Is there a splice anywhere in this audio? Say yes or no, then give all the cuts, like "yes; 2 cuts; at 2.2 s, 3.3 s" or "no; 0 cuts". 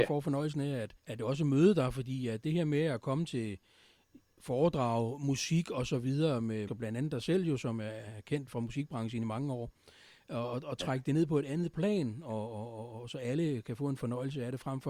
yes; 2 cuts; at 1.0 s, 6.7 s